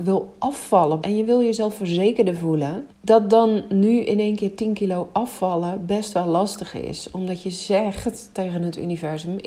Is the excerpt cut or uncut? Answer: cut